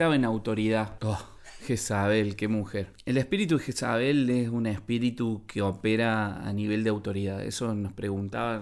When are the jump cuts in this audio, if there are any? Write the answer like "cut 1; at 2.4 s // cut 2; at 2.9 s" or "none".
cut 1; at 1.0 s